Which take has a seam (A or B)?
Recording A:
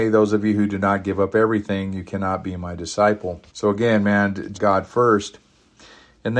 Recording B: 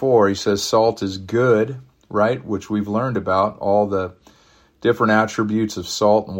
A